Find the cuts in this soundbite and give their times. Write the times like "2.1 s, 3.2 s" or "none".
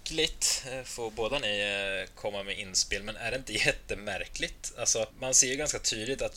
5.1 s